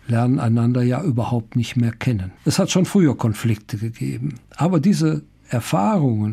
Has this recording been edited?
yes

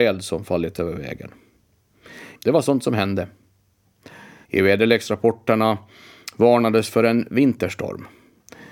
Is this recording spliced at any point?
yes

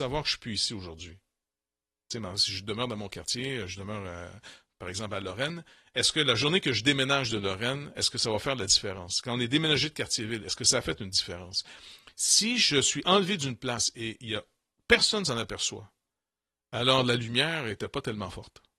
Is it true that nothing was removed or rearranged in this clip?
yes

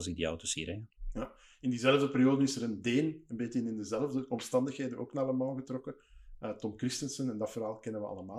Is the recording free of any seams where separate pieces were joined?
yes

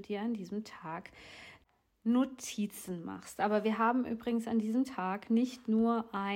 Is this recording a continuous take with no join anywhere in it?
yes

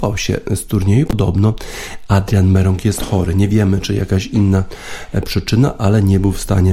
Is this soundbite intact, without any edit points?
no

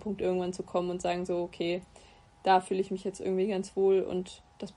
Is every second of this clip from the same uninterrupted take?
yes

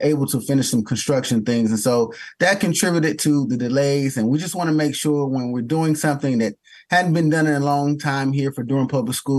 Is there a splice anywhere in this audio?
no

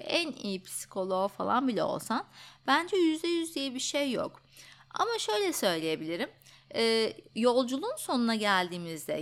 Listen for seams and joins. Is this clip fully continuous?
yes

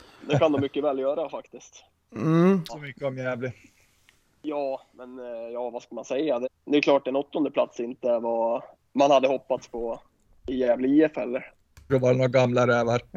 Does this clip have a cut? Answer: yes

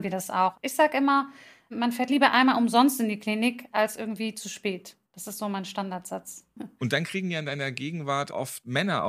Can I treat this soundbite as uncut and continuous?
no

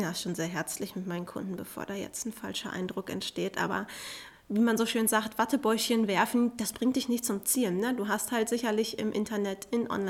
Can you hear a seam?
no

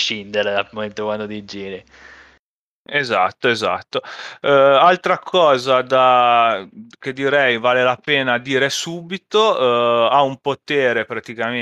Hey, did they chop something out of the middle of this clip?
no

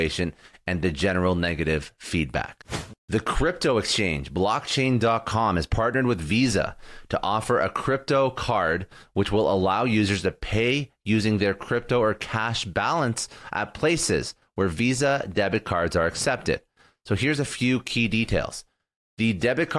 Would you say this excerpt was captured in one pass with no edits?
yes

